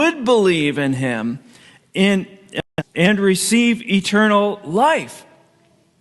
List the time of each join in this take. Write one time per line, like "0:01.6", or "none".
0:02.8